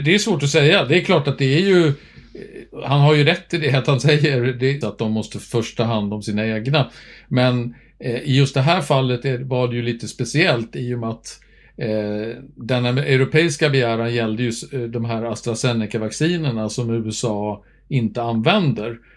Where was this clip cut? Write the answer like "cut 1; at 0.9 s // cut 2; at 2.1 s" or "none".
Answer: cut 1; at 4.8 s